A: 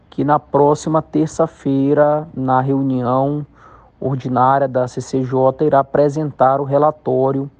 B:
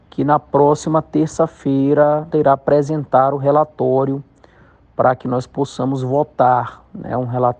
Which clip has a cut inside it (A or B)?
B